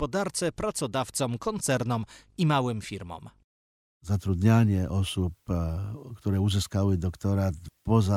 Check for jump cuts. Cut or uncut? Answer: uncut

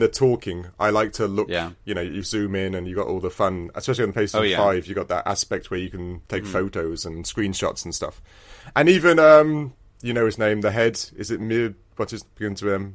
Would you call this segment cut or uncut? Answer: uncut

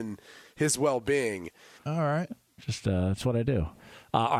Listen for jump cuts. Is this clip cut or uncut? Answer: cut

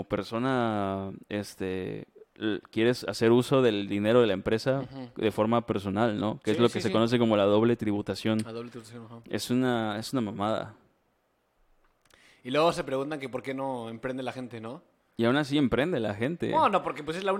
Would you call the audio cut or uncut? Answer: uncut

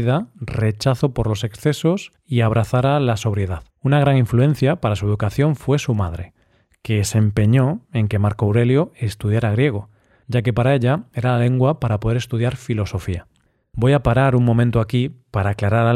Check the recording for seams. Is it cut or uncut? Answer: cut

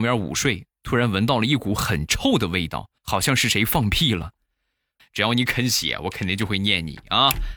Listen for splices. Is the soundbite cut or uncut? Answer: cut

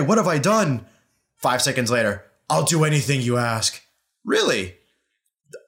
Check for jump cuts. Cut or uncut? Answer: uncut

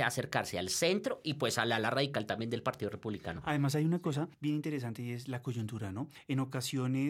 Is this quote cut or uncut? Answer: uncut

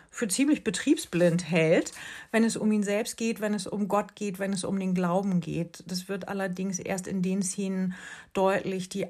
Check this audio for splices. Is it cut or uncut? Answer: uncut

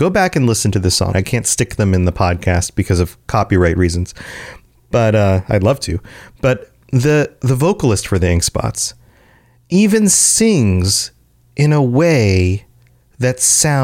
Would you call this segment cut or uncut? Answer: cut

